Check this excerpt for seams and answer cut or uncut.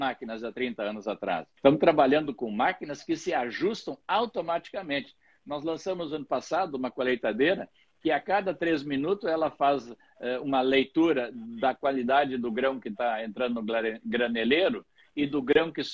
cut